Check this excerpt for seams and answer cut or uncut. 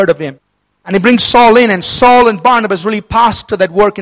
uncut